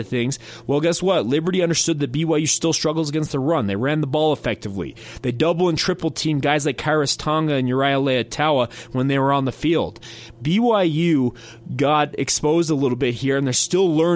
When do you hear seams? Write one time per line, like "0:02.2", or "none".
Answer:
none